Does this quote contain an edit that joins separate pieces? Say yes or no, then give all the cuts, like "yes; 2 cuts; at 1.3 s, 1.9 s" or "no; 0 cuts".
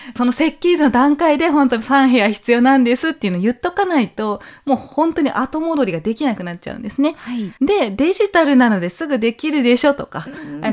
yes; 1 cut; at 7.6 s